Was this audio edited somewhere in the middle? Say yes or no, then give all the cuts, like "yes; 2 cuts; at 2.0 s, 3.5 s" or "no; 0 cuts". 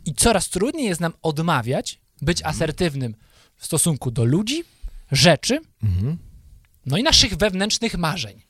no; 0 cuts